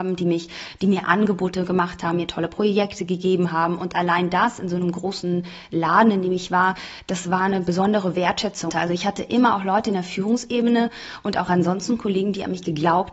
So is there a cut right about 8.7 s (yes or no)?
yes